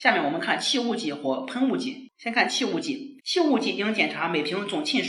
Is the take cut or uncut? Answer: cut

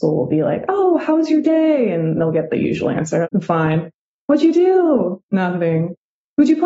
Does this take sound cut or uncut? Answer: cut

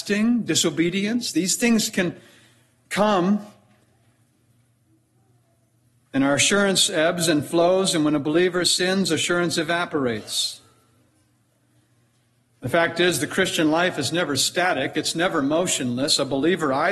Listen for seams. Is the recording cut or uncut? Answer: uncut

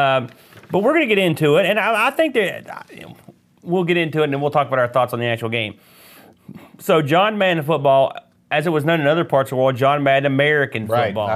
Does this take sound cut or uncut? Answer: uncut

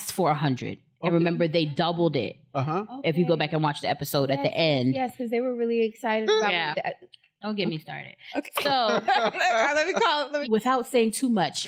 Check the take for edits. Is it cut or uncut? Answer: cut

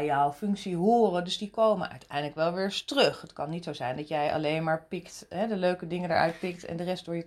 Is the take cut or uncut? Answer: uncut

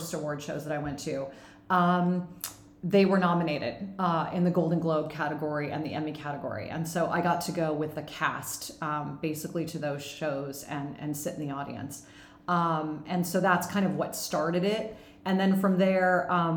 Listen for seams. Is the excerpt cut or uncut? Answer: uncut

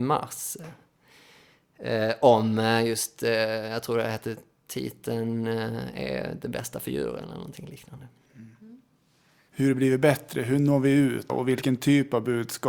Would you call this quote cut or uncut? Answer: cut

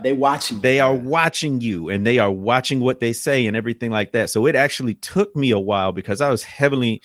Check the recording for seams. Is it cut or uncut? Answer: uncut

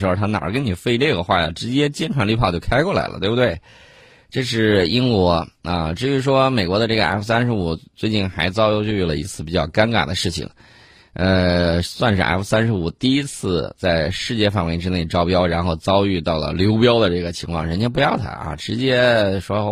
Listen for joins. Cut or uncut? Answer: uncut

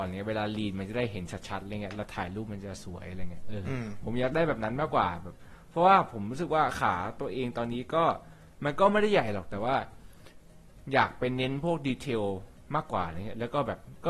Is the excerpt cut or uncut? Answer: uncut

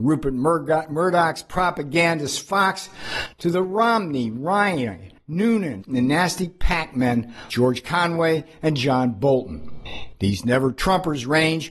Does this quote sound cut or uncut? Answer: cut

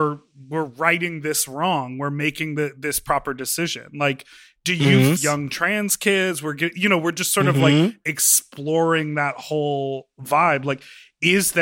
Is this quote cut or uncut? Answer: cut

